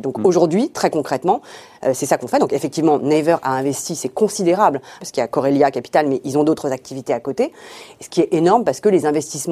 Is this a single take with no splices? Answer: no; 1 cut; at 5.0 s

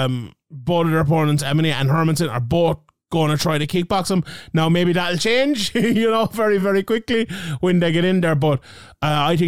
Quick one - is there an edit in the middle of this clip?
no; 0 cuts

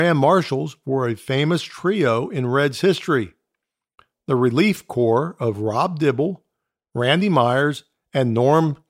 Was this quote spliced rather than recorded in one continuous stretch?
no; 0 cuts

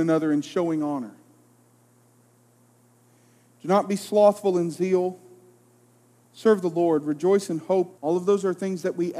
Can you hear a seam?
yes; 2 cuts; at 6.2 s, 8.0 s

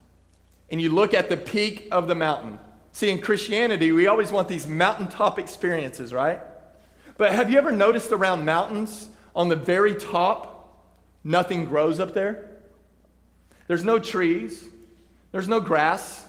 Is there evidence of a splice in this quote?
no; 0 cuts

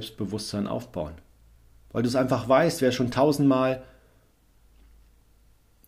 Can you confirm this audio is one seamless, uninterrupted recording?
yes; 0 cuts

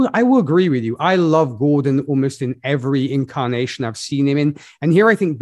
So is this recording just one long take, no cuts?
yes; 0 cuts

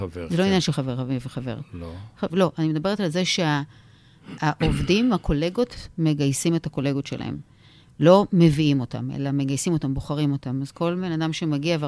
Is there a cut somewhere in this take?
yes; 1 cut; at 2.3 s

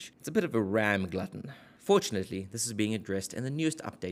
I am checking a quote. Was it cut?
no; 0 cuts

